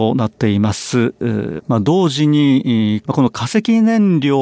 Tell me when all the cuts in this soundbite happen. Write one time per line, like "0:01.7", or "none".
0:01.6
0:03.0